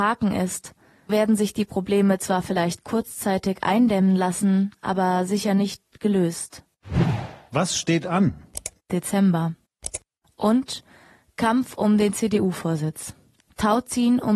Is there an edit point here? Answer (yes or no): yes